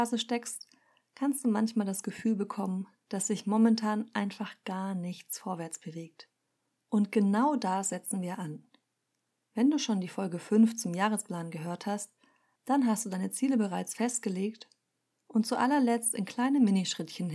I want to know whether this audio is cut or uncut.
uncut